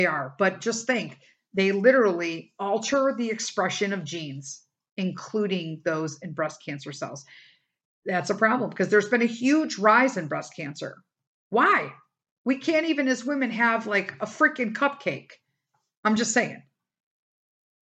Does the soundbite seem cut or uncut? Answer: uncut